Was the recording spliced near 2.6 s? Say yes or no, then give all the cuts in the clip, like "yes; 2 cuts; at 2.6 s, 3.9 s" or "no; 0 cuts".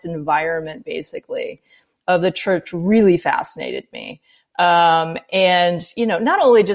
no; 0 cuts